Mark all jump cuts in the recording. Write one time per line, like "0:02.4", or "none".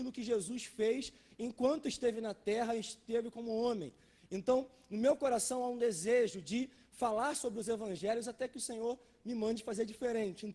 none